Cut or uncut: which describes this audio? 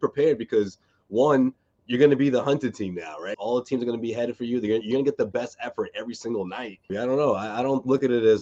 cut